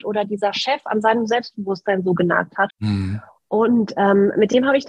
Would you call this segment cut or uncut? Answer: cut